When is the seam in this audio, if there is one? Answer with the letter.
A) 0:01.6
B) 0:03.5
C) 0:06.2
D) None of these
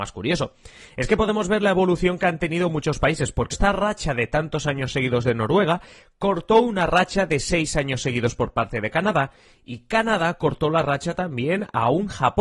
B